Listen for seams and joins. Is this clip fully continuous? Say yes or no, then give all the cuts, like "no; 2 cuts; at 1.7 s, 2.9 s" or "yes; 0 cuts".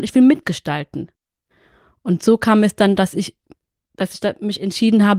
yes; 0 cuts